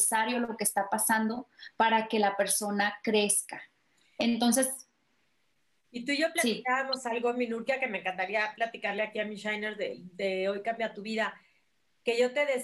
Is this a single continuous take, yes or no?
yes